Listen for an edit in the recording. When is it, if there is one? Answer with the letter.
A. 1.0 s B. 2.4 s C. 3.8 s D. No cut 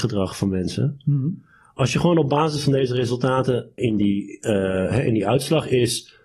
C